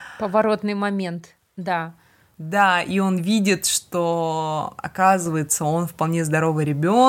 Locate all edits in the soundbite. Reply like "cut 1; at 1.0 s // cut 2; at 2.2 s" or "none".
none